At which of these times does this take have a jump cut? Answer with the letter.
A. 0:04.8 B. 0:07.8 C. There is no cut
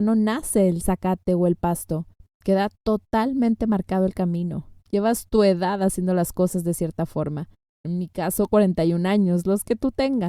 A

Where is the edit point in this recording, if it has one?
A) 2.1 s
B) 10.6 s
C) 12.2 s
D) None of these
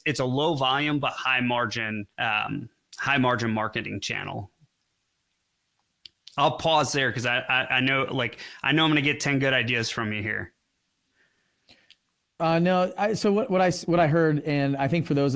A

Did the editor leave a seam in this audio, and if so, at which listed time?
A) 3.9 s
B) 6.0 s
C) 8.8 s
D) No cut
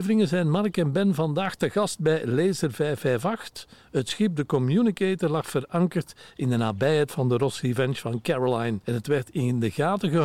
D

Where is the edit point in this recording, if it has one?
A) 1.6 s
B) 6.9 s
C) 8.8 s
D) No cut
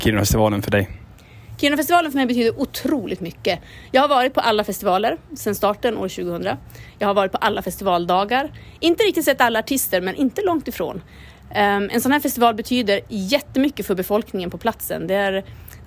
D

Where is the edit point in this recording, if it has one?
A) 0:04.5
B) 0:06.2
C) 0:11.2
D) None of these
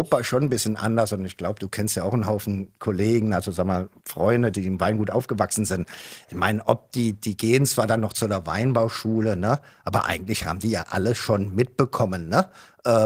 A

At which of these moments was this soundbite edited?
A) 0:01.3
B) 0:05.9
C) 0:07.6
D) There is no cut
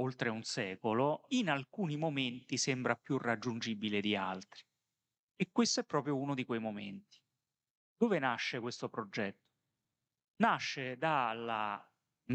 A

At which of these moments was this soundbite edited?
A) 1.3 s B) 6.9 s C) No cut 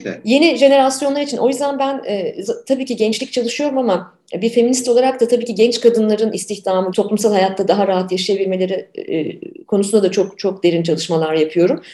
B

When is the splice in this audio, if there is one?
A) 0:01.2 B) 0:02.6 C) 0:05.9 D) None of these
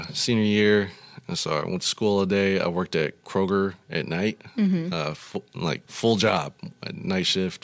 C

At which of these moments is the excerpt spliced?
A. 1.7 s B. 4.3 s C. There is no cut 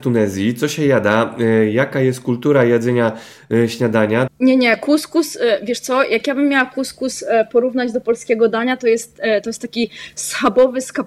B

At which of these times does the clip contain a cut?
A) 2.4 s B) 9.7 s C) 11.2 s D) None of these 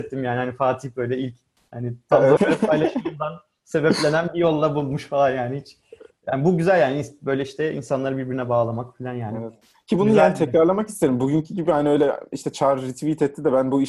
A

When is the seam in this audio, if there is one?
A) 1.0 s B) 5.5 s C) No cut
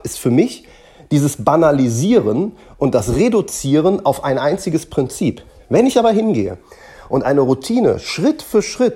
C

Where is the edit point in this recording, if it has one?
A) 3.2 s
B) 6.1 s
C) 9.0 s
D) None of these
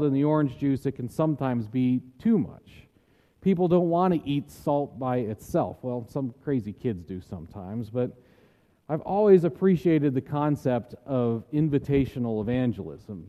D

